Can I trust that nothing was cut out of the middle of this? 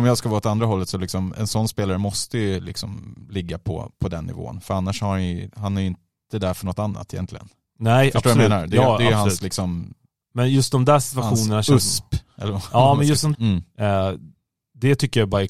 no; 1 cut; at 13.3 s

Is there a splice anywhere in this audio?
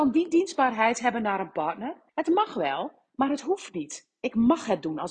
yes; 1 cut; at 2.1 s

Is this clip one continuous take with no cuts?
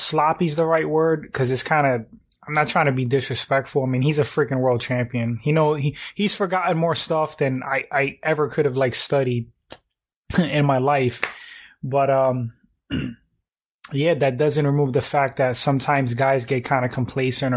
yes; 0 cuts

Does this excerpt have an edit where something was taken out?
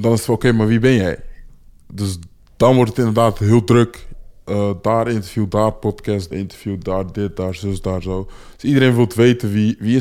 yes; 1 cut; at 6.3 s

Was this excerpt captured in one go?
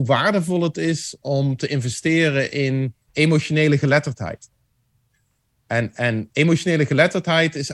no; 2 cuts; at 3.1 s, 6.3 s

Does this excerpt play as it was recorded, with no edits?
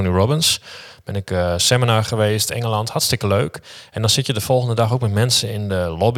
yes; 0 cuts

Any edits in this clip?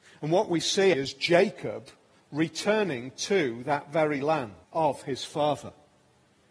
yes; 2 cuts; at 0.9 s, 4.6 s

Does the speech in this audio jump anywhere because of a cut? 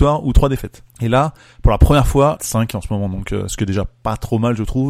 yes; 2 cuts; at 0.9 s, 2.4 s

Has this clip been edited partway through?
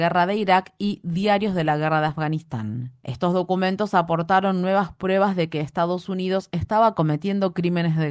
no; 0 cuts

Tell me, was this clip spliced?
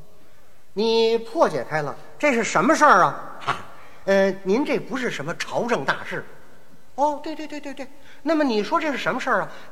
no; 0 cuts

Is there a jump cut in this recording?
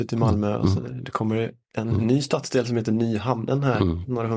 no; 0 cuts

